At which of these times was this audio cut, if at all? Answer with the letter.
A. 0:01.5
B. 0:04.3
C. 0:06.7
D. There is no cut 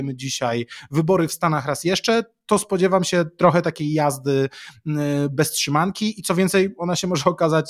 D